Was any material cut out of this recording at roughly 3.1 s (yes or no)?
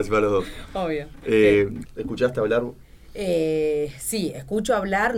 no